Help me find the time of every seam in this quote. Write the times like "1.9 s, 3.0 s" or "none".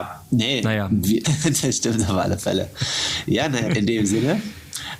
1.2 s, 3.7 s